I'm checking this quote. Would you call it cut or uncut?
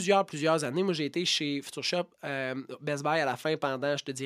uncut